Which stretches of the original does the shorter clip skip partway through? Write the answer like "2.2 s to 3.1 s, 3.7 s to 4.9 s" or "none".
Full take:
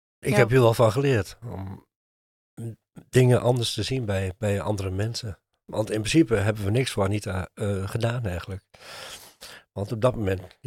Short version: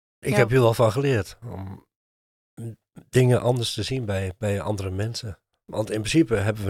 none